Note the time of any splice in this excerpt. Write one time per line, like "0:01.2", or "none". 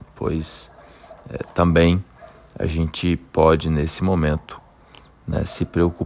none